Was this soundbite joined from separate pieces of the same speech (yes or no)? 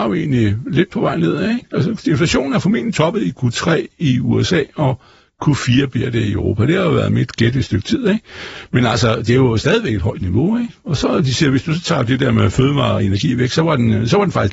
no